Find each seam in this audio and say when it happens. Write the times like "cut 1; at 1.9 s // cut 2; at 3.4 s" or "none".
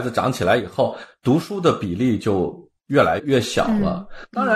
cut 1; at 3.2 s